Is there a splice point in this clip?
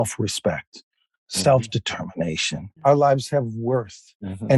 yes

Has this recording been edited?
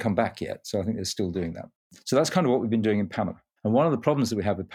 no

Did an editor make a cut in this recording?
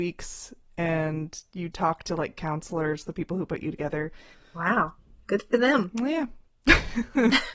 yes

